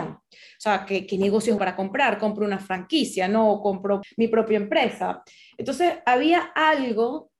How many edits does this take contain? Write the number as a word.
two